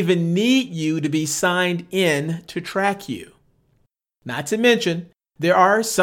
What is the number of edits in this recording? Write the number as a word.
zero